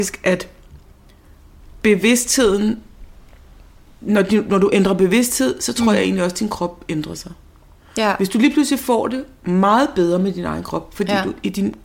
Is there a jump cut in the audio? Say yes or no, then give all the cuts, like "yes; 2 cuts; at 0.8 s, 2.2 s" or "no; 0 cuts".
no; 0 cuts